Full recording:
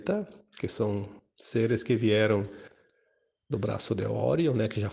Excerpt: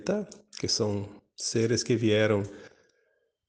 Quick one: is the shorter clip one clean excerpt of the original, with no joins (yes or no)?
yes